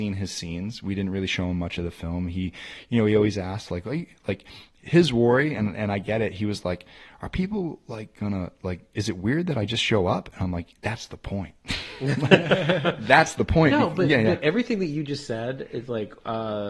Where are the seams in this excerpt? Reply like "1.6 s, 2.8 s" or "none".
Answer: none